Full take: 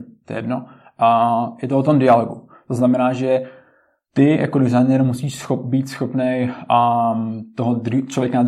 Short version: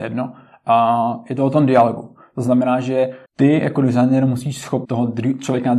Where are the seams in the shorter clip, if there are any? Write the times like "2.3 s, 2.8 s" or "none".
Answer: 3.3 s, 4.8 s